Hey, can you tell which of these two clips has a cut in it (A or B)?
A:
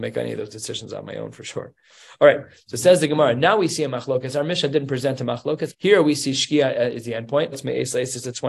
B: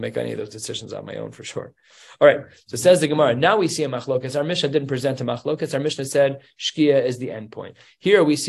A